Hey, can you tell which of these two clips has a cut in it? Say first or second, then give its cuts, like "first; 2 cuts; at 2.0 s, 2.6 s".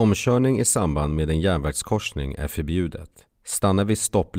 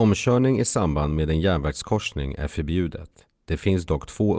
first; 1 cut; at 3.3 s